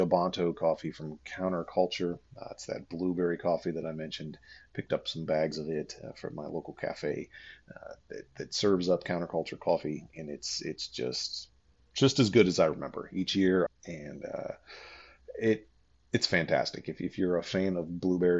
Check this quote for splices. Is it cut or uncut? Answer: cut